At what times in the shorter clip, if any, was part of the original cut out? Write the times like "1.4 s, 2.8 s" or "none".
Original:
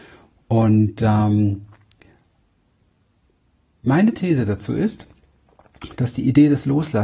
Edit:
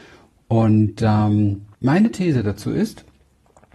1.7 s